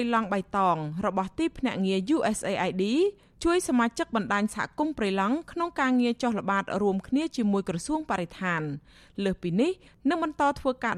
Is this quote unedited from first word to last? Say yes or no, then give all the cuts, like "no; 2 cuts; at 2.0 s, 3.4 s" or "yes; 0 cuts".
yes; 0 cuts